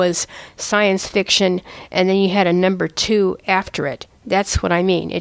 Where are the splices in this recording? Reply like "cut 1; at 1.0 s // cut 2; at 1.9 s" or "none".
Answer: none